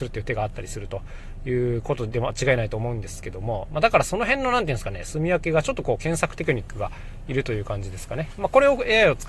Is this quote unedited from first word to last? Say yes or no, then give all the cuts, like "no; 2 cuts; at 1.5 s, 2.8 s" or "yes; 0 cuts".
yes; 0 cuts